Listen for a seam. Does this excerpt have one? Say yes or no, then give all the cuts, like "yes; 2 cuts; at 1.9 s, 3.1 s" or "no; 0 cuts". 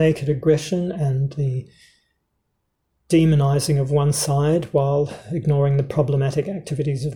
no; 0 cuts